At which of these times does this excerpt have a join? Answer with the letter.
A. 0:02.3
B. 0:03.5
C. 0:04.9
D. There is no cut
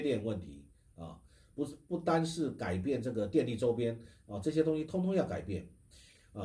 D